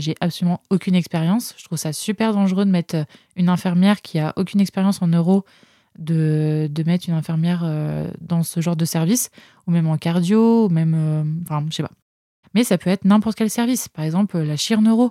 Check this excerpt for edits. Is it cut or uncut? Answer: cut